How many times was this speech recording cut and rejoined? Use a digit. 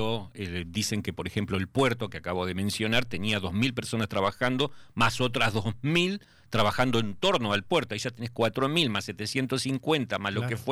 0